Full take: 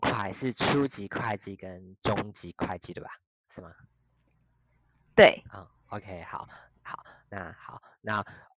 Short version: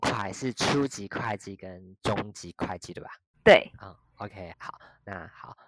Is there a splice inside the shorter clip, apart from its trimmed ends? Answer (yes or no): yes